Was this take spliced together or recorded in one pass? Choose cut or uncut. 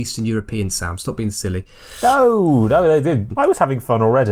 cut